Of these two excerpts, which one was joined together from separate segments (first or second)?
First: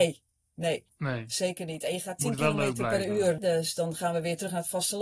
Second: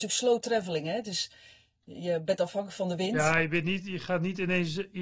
first